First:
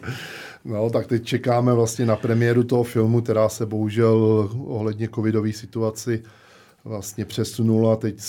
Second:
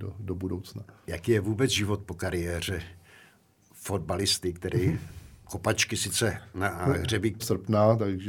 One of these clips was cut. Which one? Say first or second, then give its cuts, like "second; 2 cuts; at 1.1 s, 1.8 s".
second; 1 cut; at 7.4 s